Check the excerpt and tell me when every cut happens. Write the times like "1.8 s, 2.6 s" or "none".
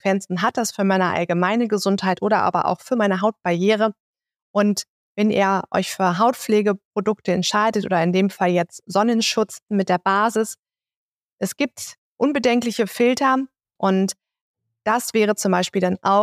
9.7 s, 13.8 s